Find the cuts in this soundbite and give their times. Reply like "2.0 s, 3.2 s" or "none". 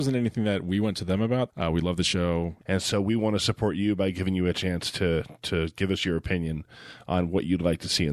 1.5 s, 2.6 s